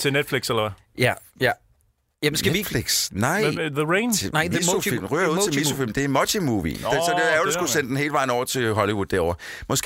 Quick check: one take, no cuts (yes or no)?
yes